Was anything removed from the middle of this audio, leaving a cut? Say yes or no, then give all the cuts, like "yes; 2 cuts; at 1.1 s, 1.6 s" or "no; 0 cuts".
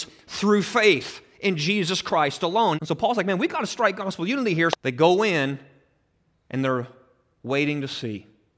yes; 2 cuts; at 2.7 s, 4.7 s